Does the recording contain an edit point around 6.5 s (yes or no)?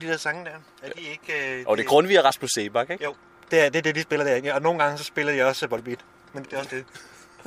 yes